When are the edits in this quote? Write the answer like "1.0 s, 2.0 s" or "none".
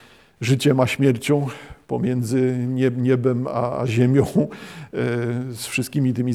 none